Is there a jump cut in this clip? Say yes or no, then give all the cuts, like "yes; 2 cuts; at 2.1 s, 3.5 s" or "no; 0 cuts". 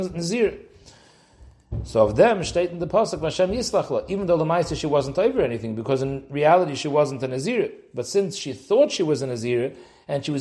no; 0 cuts